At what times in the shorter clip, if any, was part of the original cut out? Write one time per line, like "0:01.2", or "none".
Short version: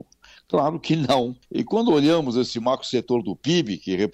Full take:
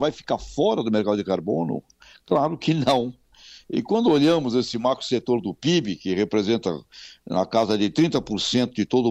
0:01.4